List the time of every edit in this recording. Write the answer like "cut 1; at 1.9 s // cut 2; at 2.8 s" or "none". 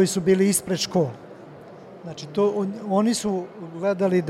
none